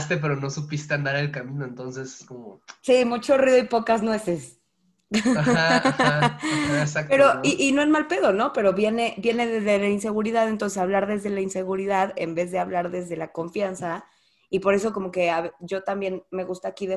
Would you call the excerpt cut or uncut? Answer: uncut